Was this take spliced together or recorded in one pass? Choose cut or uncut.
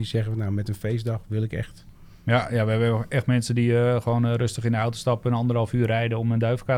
uncut